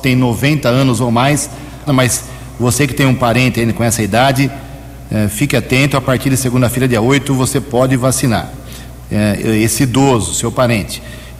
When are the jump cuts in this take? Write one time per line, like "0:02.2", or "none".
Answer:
0:01.9